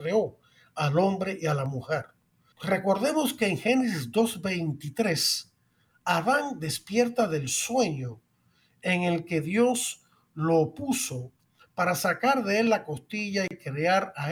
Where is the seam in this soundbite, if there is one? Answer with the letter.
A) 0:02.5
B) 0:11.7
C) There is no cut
A